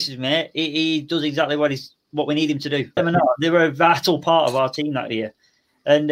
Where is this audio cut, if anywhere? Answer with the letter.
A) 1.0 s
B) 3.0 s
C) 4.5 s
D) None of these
B